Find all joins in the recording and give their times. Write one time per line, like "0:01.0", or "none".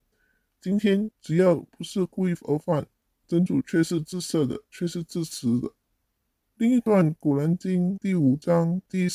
0:01.1